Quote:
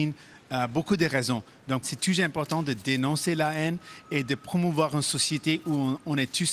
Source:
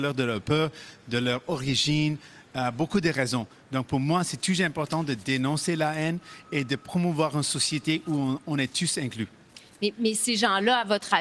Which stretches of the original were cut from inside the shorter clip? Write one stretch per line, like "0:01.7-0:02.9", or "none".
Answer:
0:03.9-0:04.2